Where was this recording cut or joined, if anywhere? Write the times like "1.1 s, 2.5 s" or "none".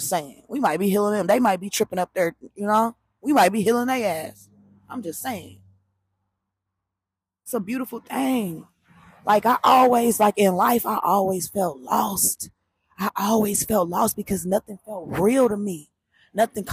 none

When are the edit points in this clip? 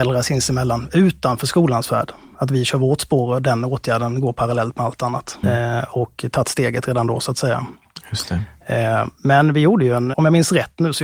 5.4 s, 10.1 s

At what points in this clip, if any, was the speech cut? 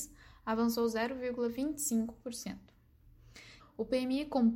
3.6 s

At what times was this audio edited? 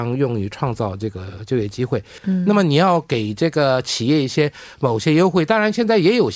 2.2 s

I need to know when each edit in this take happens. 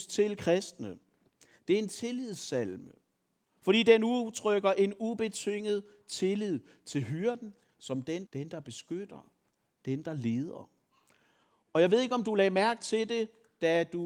8.3 s

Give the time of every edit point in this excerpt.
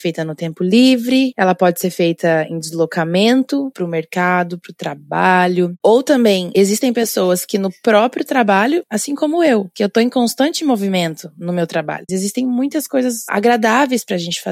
9.7 s, 12.1 s

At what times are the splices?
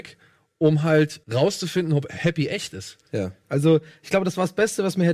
1.2 s, 3.4 s

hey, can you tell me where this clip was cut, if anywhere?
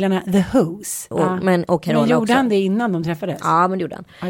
1.1 s

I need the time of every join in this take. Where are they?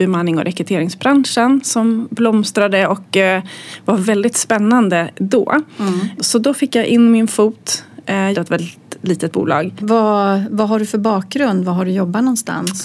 6.2 s, 8.3 s, 9.8 s

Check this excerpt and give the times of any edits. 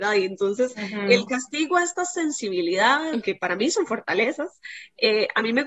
3.2 s

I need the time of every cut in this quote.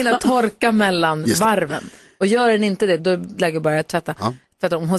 3.0 s

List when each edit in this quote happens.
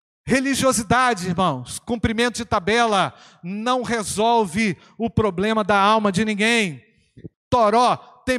7.3 s

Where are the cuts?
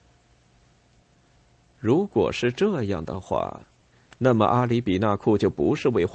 none

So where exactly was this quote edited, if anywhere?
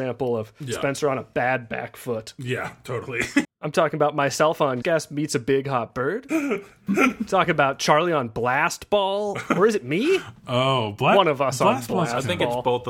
3.4 s, 4.8 s

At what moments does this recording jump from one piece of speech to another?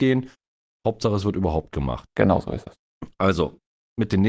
none

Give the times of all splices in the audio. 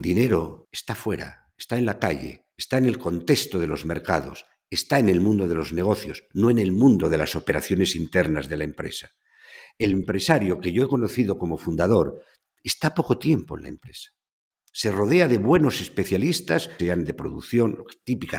16.8 s

